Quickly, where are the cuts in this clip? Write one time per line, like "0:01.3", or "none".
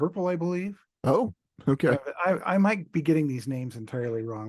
none